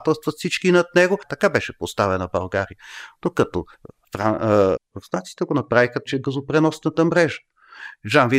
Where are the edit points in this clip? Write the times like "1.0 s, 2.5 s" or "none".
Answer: 4.8 s, 6.1 s